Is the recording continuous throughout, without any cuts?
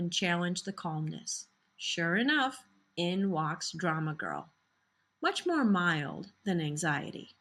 yes; 0 cuts

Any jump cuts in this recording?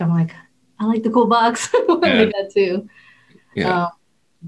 yes; 1 cut; at 2.3 s

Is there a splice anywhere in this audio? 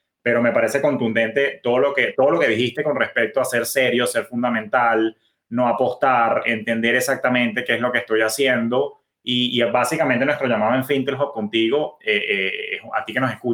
no; 0 cuts

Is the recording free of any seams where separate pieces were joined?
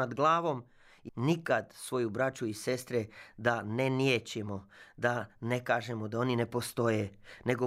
no; 1 cut; at 1.1 s

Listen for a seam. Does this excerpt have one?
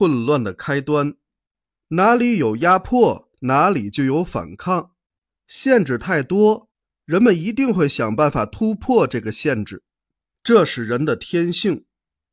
no; 0 cuts

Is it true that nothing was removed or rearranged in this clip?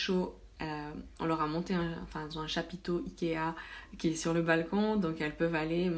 yes; 0 cuts

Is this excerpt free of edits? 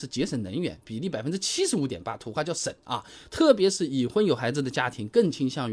yes; 0 cuts

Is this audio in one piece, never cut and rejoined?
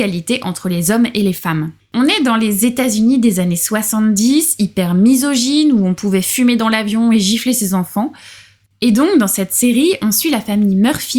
no; 1 cut; at 1.9 s

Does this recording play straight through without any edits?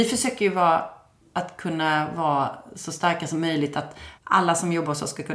no; 1 cut; at 4.2 s

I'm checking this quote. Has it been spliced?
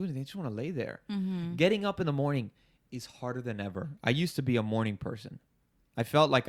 no; 0 cuts

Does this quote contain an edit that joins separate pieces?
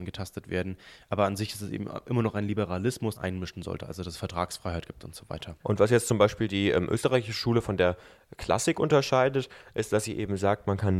yes; 2 cuts; at 3.2 s, 5.6 s

